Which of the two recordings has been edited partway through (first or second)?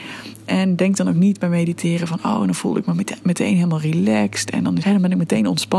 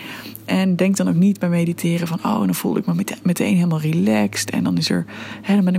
first